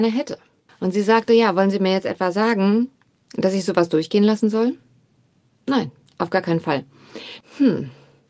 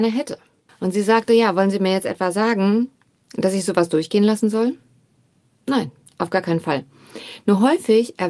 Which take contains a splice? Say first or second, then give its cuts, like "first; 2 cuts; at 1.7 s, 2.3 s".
first; 1 cut; at 7.4 s